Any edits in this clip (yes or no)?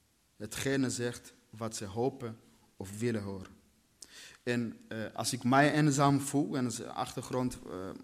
no